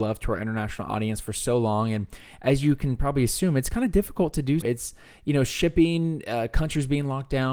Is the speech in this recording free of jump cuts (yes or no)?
no